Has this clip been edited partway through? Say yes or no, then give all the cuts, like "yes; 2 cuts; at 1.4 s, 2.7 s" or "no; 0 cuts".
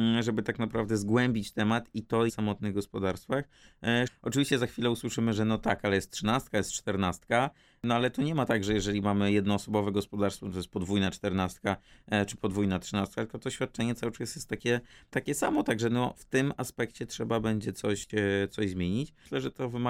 yes; 2 cuts; at 2.3 s, 4.1 s